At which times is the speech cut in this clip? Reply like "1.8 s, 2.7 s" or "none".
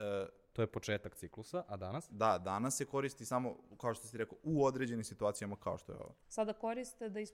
6.2 s

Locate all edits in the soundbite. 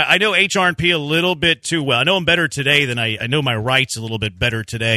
1.6 s, 3.2 s

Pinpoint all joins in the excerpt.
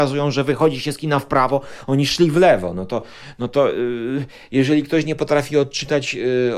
none

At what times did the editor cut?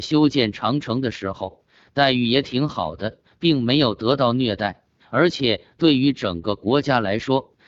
none

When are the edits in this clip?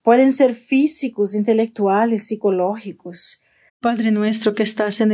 3.7 s

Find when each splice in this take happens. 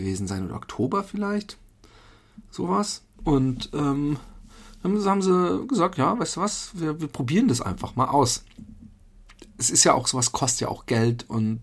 none

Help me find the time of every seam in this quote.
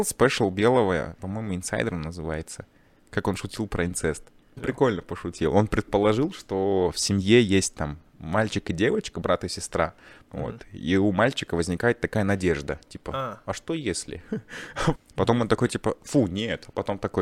4.6 s, 10.2 s, 14.9 s

